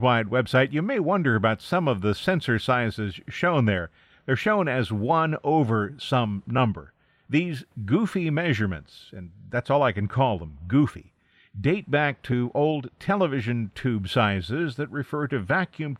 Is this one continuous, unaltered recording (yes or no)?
yes